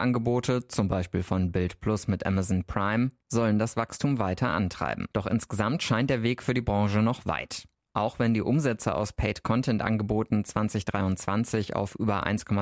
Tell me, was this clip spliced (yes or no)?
yes